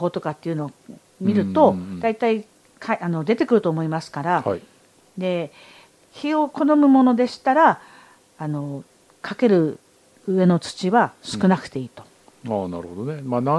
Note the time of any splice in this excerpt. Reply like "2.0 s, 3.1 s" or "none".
none